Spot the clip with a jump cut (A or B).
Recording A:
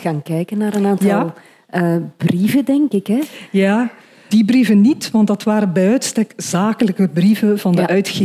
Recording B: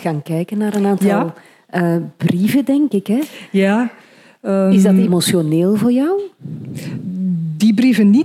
A